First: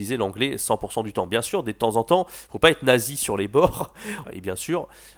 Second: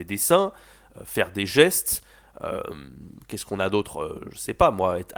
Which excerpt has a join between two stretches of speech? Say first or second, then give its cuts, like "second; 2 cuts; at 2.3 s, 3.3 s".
first; 1 cut; at 4.2 s